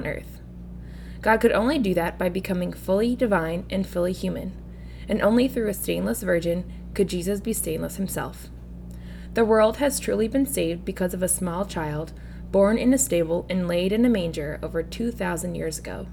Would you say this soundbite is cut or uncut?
uncut